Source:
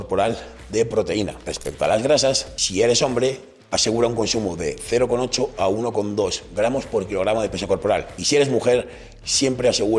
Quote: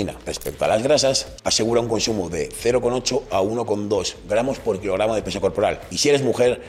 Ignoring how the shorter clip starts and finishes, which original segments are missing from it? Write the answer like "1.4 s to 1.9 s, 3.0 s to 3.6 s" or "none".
2.6 s to 3.6 s